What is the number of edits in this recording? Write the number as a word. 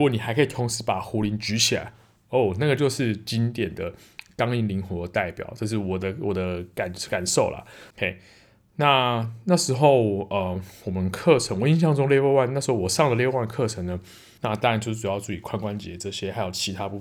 two